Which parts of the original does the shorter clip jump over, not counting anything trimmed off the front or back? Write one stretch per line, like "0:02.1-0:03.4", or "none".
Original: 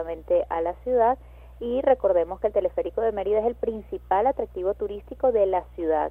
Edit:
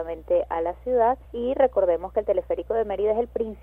0:01.2-0:01.5